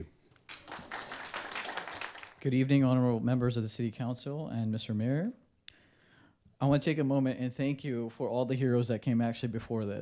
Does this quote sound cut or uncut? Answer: uncut